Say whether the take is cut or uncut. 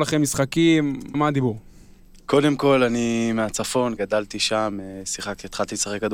cut